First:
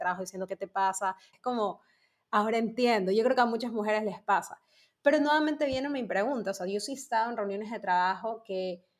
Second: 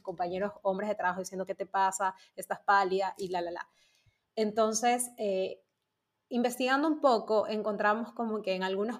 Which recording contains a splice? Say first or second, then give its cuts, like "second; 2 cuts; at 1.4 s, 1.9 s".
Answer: first; 1 cut; at 1.3 s